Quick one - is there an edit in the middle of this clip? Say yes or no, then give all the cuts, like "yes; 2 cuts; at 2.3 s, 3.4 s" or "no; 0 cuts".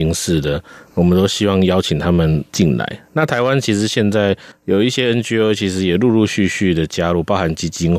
no; 0 cuts